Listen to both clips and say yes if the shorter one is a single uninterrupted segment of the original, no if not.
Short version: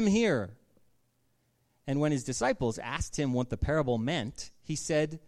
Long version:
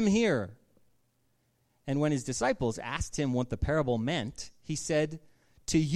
yes